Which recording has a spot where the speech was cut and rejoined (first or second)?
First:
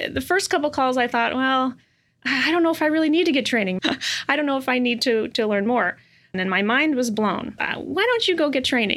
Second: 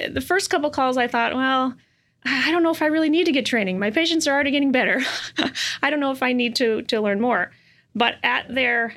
first